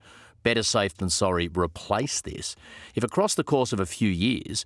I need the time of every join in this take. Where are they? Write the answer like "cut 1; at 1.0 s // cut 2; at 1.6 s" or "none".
none